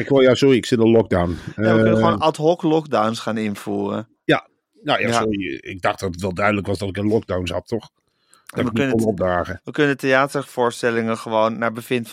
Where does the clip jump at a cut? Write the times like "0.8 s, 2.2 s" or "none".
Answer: none